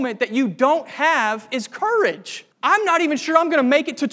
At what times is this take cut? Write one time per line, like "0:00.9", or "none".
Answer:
0:02.5